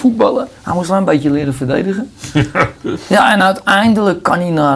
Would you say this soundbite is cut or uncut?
uncut